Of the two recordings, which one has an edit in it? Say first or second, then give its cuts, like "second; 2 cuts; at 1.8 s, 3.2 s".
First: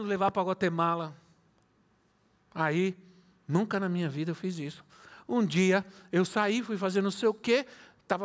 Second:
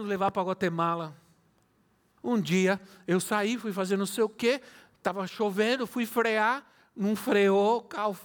second; 1 cut; at 2.2 s